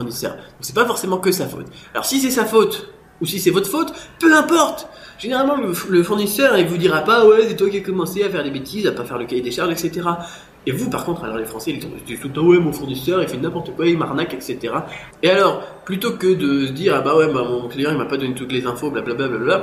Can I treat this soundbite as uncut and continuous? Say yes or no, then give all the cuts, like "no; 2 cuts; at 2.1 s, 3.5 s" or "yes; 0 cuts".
no; 1 cut; at 15.1 s